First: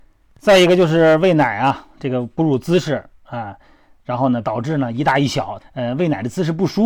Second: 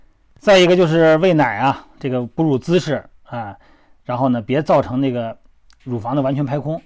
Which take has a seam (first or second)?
first